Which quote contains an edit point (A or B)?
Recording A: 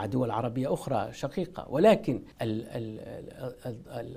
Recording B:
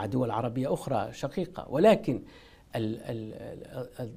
A